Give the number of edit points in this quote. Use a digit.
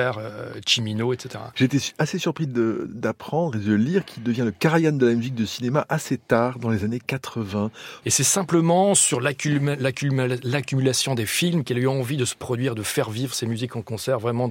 2